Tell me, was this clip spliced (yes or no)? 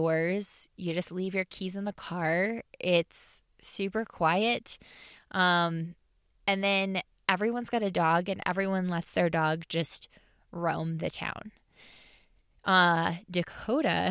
no